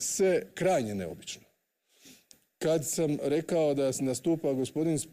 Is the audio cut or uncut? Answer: uncut